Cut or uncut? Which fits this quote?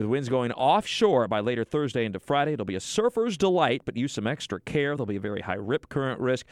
uncut